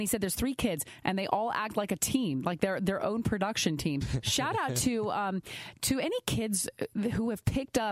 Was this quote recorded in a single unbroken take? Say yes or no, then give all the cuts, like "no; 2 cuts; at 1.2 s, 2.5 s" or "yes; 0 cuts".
no; 1 cut; at 4.0 s